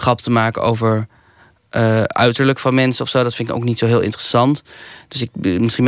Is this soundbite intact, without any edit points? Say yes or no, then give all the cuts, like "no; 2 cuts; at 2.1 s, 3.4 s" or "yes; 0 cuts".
yes; 0 cuts